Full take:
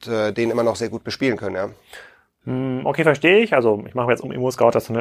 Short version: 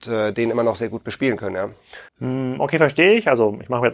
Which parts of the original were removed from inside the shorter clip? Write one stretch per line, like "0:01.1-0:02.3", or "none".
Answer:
0:02.1-0:02.3